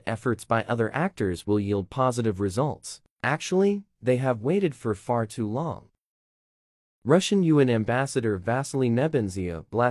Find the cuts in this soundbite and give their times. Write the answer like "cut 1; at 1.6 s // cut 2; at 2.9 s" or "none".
cut 1; at 3.1 s // cut 2; at 6.9 s